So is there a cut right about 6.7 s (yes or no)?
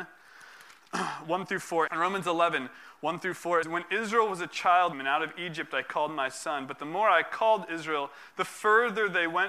no